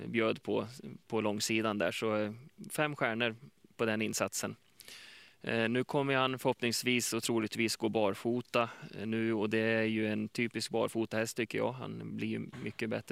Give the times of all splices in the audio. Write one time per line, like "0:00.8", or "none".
none